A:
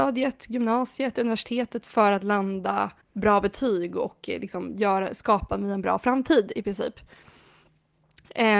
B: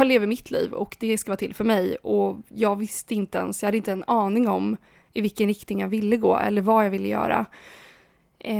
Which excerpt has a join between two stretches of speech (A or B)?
A